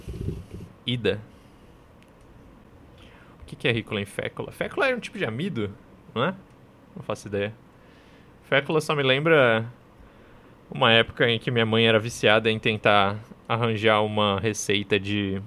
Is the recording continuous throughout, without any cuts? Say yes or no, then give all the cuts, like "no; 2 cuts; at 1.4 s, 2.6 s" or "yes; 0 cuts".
no; 1 cut; at 3.3 s